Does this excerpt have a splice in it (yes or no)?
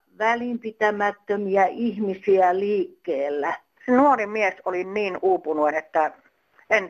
yes